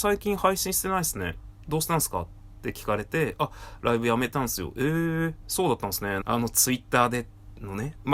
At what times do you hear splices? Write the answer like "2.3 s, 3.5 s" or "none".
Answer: 6.2 s